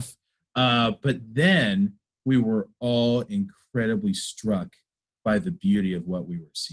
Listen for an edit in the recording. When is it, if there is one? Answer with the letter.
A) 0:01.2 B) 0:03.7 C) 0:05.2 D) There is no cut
D